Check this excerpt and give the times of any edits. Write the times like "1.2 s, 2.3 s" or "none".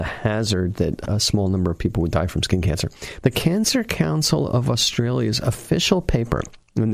3.2 s